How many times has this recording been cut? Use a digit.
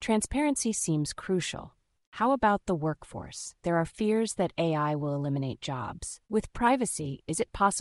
2